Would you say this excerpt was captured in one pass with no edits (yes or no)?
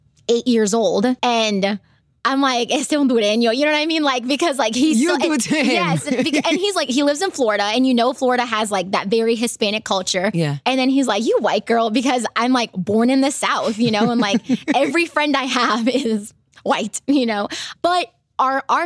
no